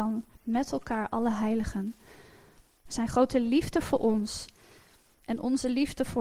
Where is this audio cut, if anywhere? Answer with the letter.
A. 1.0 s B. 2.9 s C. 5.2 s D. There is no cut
B